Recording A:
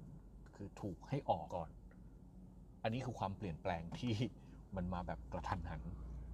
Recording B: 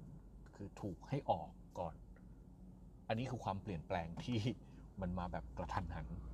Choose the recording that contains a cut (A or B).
A